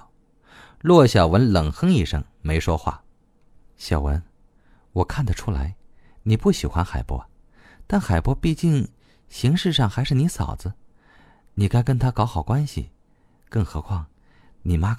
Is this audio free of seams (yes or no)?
yes